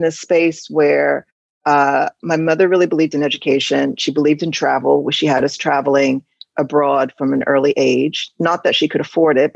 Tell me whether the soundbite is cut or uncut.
uncut